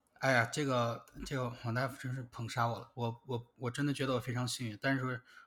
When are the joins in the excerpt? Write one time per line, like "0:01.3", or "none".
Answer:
0:02.9

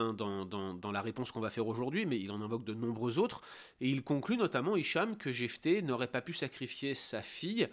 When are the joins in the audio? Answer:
0:03.8

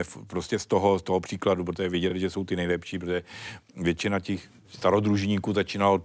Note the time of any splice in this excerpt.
none

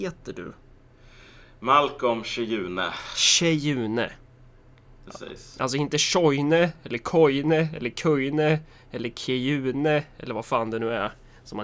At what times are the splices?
none

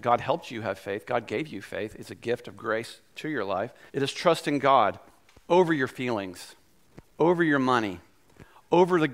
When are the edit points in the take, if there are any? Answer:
0:03.9

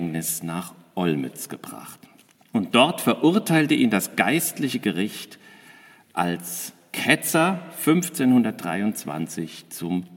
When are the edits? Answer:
none

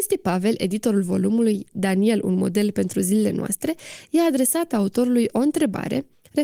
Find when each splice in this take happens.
none

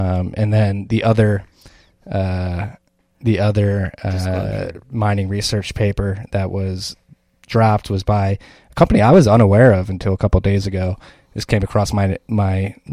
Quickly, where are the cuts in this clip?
none

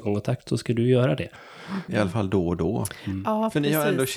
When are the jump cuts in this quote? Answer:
0:01.9

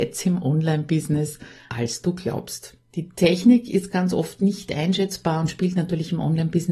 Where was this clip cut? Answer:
0:01.7
0:02.9

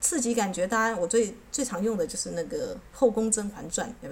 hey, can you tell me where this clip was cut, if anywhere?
none

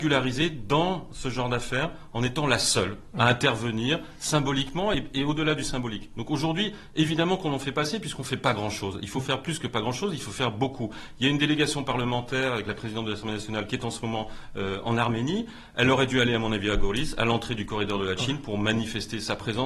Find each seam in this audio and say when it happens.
none

